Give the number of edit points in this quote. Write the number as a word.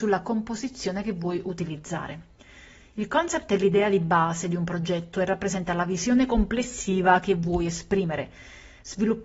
zero